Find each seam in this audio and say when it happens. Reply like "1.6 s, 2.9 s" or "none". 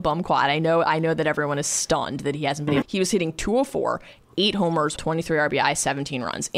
2.8 s, 5.0 s